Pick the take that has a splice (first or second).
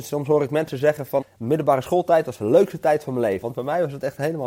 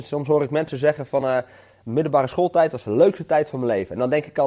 first